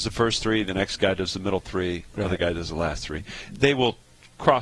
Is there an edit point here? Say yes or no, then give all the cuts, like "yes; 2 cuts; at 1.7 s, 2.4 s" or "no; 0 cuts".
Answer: no; 0 cuts